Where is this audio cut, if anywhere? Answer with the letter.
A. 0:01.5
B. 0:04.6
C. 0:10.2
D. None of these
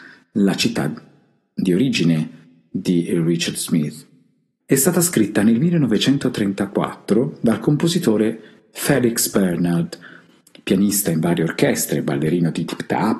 B